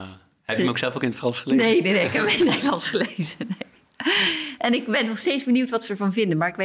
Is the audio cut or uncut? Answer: uncut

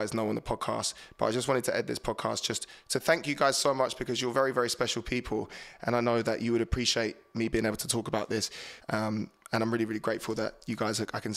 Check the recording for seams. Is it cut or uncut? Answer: cut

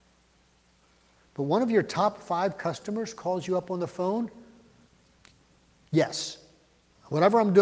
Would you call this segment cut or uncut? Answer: uncut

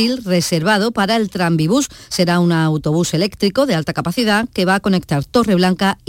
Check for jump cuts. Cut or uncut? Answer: uncut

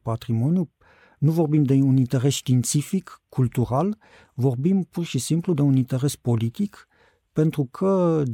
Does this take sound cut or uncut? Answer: uncut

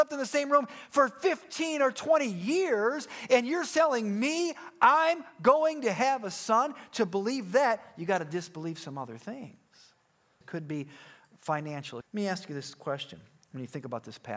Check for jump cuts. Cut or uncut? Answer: cut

